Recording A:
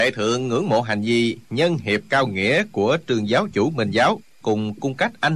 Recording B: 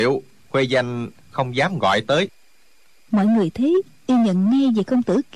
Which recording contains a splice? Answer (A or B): A